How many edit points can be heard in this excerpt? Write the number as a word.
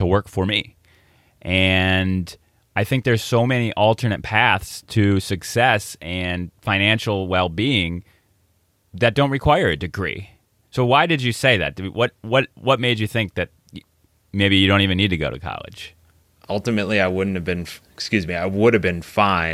two